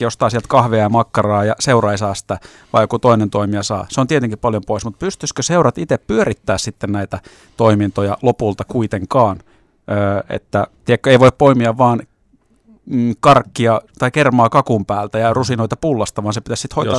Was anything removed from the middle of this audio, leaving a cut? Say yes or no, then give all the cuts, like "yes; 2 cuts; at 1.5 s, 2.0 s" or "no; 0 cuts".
no; 0 cuts